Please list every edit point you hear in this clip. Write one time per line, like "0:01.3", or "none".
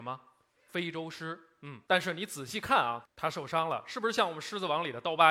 0:01.8
0:03.0